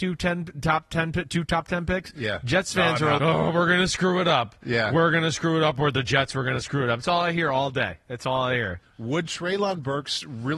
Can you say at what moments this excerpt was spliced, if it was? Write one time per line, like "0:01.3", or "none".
0:03.2